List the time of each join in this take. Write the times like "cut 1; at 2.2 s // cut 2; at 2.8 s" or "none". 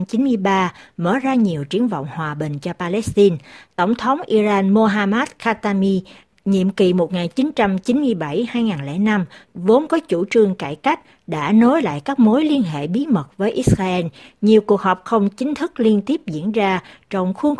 none